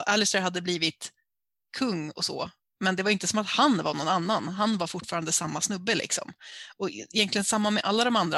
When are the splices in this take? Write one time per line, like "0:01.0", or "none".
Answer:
none